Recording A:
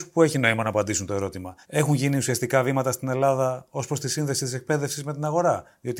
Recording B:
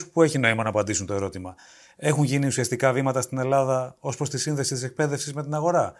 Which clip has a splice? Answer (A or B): A